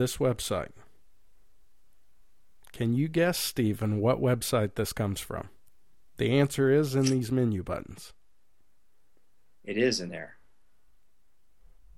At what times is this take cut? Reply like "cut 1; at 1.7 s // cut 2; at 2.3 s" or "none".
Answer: none